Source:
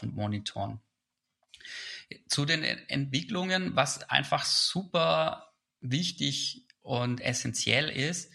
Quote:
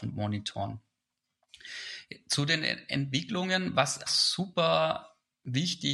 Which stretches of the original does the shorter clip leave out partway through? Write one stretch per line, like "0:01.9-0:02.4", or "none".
0:04.1-0:04.4